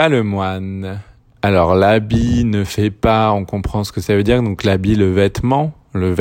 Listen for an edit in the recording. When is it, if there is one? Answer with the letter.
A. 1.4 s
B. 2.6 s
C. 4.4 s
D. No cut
A